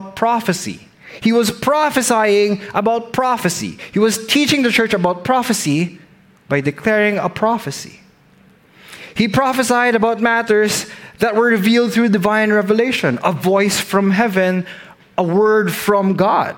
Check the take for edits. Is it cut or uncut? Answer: uncut